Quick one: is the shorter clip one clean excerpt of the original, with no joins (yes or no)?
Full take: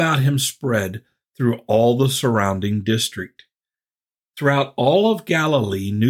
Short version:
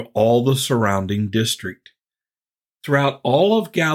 yes